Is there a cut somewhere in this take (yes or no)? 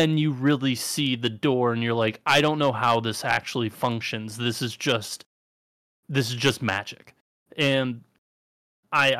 no